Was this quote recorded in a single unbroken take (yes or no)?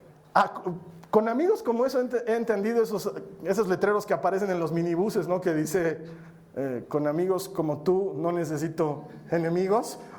yes